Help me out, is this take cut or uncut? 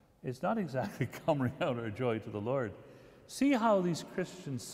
uncut